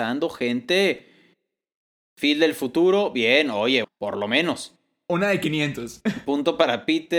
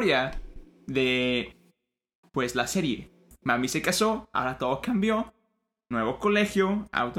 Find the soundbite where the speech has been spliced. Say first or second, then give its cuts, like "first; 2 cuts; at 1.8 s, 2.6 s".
first; 1 cut; at 3.8 s